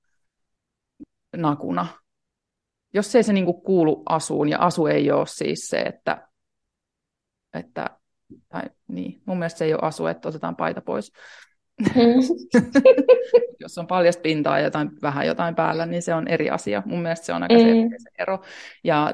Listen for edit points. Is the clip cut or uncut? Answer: uncut